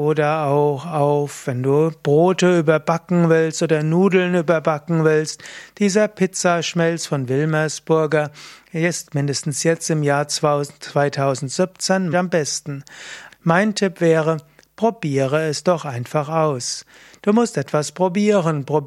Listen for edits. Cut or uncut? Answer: cut